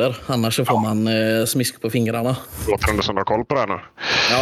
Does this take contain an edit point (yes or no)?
no